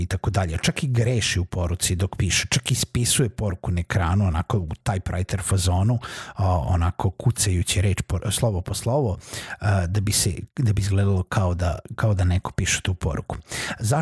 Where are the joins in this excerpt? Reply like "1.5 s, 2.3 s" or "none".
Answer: none